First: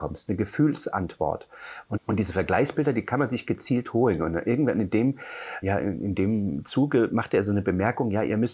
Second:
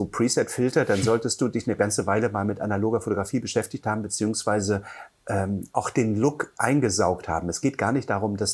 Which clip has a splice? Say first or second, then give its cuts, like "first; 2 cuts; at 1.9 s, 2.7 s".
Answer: first; 2 cuts; at 2.0 s, 5.6 s